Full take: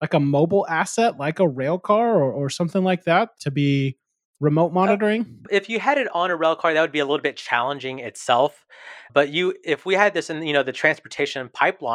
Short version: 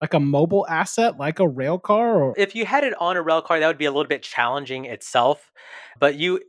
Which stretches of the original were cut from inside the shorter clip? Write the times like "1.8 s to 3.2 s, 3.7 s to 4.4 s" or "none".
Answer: 2.3 s to 5.5 s